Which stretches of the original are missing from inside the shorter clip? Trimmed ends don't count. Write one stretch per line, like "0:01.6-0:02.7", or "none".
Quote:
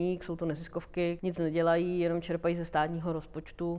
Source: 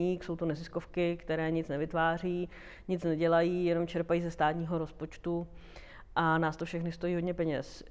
0:01.2-0:02.8